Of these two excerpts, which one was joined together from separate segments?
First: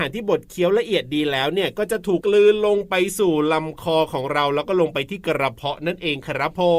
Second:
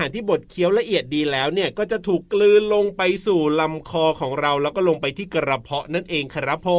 first; 1 cut; at 2.2 s

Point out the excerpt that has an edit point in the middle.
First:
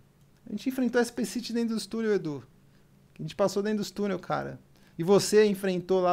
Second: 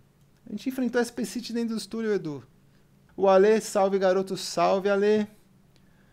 second; 1 cut; at 3.1 s

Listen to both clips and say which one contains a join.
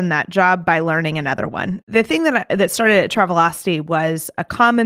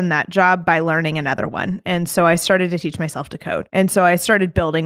first; 1 cut; at 1.8 s

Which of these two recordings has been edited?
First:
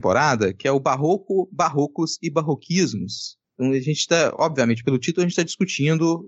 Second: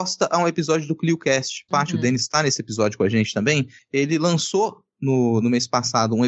second; 1 cut; at 1.7 s

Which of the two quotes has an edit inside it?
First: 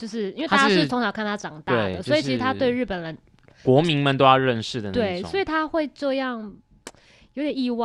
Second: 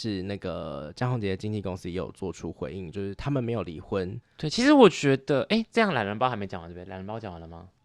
second; 1 cut; at 4.2 s

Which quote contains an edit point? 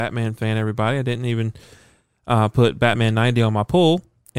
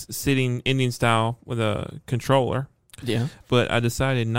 second; 1 cut; at 3.4 s

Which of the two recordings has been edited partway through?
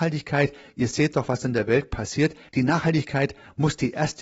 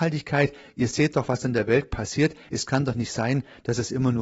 first; 1 cut; at 2.5 s

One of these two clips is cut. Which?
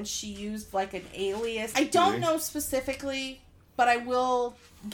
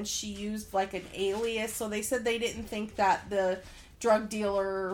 first; 1 cut; at 1.7 s

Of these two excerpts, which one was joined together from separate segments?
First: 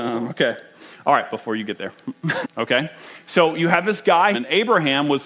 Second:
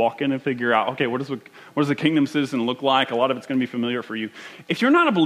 first; 2 cuts; at 2.4 s, 4.3 s

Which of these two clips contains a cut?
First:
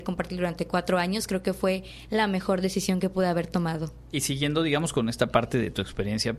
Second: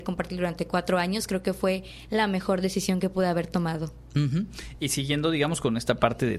first; 1 cut; at 4.1 s

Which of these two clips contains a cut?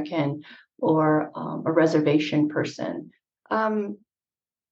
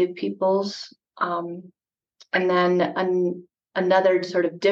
first; 1 cut; at 3.4 s

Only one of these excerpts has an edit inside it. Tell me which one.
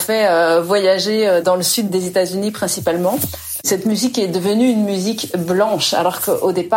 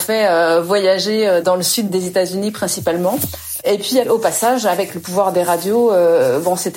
first; 1 cut; at 3.6 s

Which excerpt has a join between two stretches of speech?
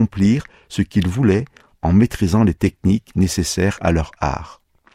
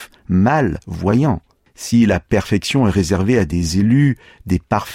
second; 1 cut; at 1.7 s

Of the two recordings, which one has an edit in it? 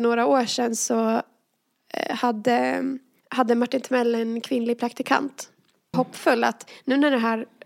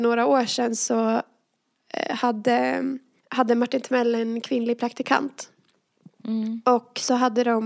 first; 1 cut; at 5.9 s

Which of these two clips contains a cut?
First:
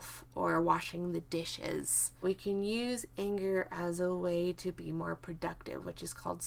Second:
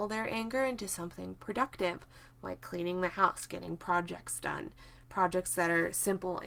first; 1 cut; at 2.2 s

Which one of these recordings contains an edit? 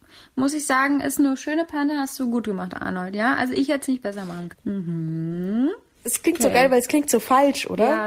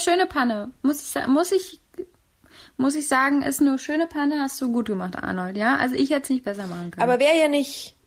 first; 2 cuts; at 4.5 s, 6.0 s

